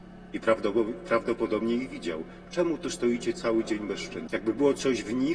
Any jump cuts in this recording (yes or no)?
yes